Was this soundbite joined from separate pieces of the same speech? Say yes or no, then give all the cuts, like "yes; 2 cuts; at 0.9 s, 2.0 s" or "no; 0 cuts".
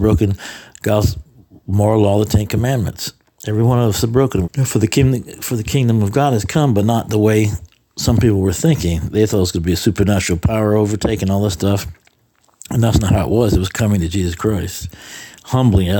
yes; 1 cut; at 4.4 s